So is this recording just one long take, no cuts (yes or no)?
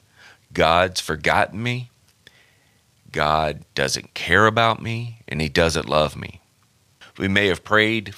no